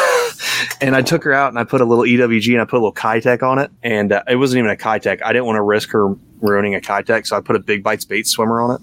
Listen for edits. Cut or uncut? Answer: cut